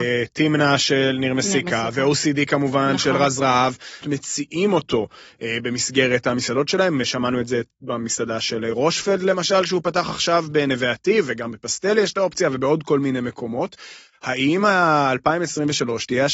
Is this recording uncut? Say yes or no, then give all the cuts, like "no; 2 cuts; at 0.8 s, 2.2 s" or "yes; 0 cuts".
no; 1 cut; at 4.0 s